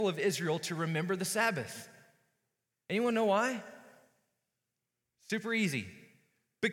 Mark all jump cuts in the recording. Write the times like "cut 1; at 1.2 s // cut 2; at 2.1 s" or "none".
none